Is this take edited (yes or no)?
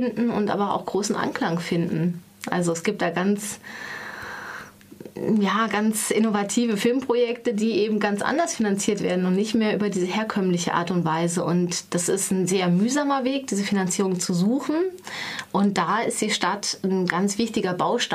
no